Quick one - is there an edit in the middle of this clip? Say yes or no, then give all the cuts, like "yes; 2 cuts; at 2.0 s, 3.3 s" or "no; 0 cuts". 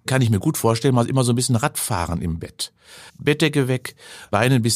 yes; 1 cut; at 3.1 s